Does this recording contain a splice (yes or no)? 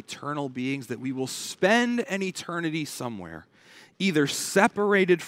no